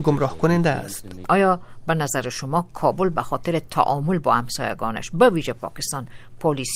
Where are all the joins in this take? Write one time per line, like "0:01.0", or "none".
0:01.2